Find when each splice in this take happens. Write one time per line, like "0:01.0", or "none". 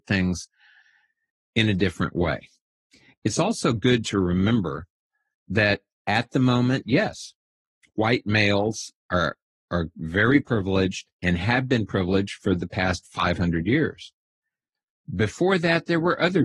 none

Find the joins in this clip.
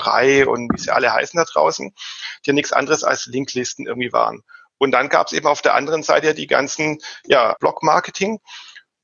0:07.6

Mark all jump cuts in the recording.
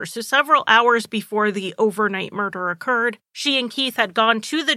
0:03.3

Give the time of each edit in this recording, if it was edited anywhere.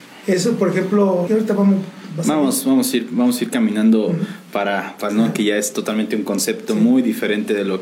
0:01.3
0:05.1

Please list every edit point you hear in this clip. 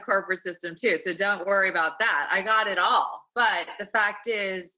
none

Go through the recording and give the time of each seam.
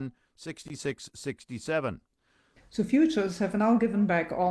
0:02.6

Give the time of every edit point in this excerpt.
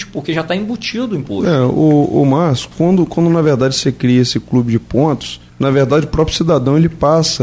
0:05.5

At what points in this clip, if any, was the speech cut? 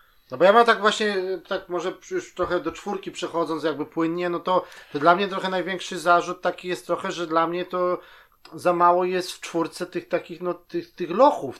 none

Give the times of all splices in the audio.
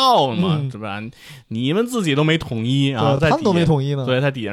none

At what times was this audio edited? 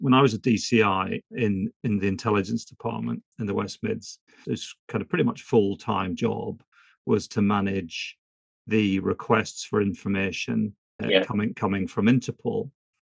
0:04.4
0:11.0

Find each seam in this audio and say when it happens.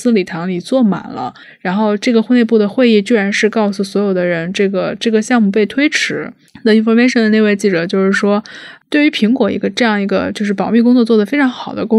none

